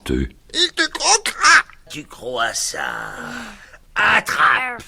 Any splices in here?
yes; 1 cut; at 1.9 s

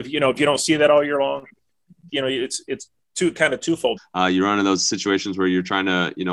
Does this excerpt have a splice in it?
yes; 2 cuts; at 2.1 s, 4.0 s

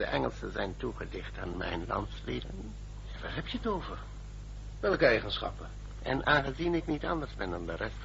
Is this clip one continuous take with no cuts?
no; 1 cut; at 6.0 s

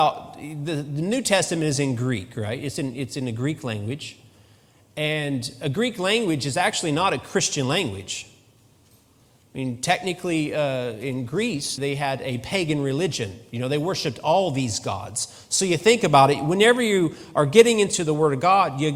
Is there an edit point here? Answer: yes; 1 cut; at 11.8 s

